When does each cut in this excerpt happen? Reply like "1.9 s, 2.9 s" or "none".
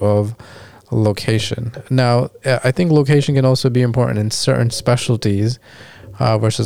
none